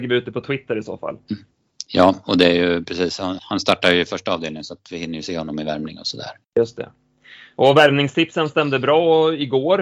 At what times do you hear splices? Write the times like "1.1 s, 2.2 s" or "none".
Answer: 3.4 s, 6.4 s